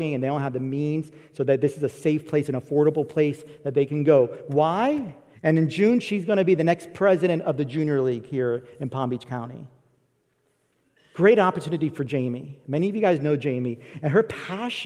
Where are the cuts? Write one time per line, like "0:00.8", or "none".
0:05.3